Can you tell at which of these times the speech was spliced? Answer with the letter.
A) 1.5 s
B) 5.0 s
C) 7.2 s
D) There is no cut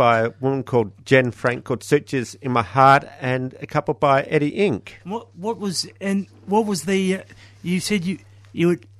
D